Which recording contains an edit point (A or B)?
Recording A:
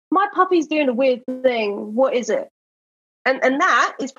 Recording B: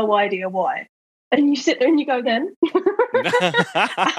B